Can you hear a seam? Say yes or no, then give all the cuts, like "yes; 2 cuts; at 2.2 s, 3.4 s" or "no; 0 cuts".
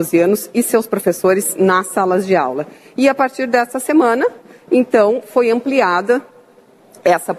no; 0 cuts